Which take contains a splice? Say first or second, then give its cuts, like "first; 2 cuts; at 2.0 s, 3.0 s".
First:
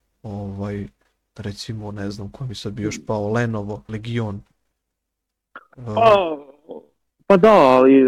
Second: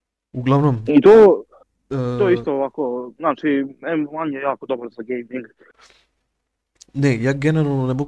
first; 1 cut; at 3.9 s